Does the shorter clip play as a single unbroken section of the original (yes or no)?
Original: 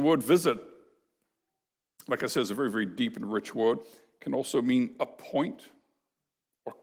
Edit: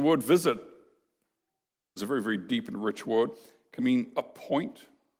no